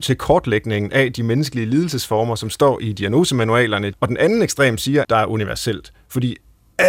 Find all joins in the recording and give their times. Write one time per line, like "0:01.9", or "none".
0:03.9
0:05.0